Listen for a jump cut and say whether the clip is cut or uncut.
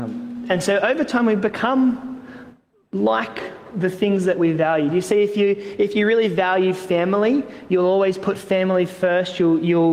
uncut